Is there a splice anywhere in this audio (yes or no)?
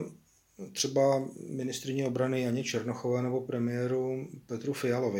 no